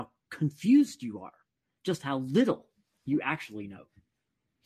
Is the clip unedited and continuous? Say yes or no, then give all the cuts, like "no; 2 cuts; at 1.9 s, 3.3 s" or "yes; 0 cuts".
yes; 0 cuts